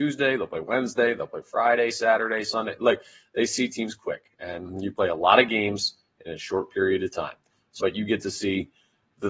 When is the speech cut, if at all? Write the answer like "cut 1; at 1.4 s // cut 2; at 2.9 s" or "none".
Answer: cut 1; at 7.8 s